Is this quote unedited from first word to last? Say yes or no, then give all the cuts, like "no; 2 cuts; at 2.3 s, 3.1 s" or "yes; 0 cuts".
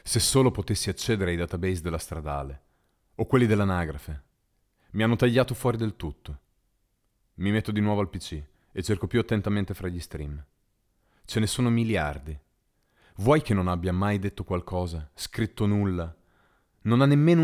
yes; 0 cuts